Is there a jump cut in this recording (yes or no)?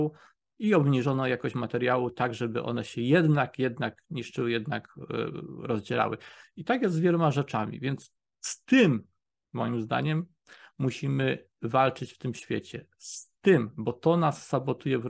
no